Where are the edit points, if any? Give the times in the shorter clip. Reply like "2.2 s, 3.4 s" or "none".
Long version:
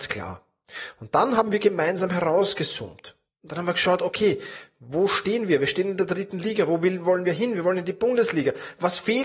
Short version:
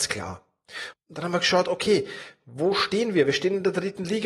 0.9 s